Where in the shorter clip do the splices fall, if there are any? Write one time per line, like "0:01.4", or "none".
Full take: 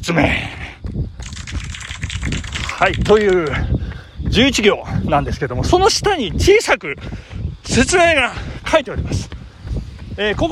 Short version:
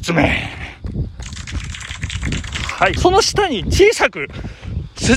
0:03.0